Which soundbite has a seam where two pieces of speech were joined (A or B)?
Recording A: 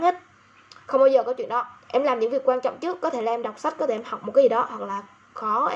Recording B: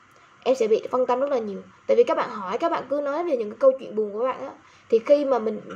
A